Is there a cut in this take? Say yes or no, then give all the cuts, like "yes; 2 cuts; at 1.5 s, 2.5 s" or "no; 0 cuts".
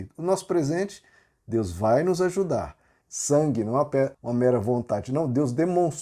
yes; 2 cuts; at 3.0 s, 4.1 s